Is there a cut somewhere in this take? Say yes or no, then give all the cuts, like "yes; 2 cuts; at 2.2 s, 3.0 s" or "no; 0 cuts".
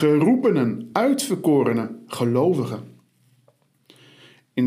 no; 0 cuts